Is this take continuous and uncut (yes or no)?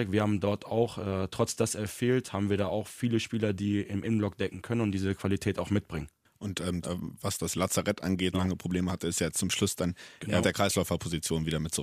no